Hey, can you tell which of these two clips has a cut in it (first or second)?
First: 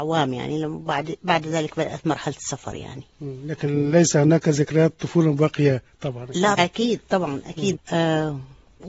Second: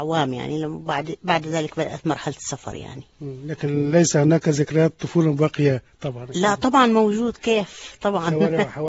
first